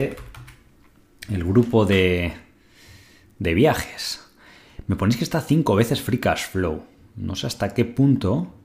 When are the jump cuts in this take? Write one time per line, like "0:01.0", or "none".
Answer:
none